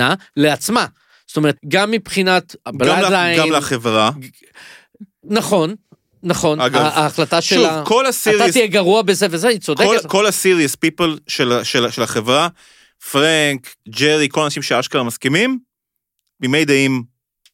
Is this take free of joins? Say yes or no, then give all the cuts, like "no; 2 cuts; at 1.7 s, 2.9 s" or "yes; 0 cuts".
no; 2 cuts; at 1.6 s, 13.8 s